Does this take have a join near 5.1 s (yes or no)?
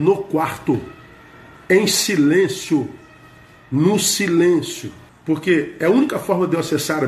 yes